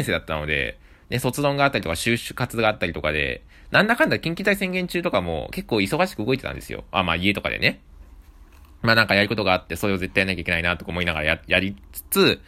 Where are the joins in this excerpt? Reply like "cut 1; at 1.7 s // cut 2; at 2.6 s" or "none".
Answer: none